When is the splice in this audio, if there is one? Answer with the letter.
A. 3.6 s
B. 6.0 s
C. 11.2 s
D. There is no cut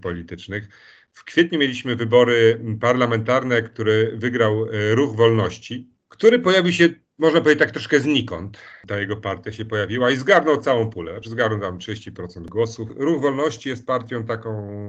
D